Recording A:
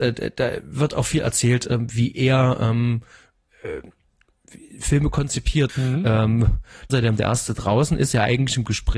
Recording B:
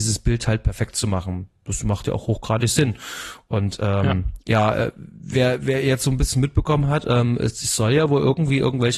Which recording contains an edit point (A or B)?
A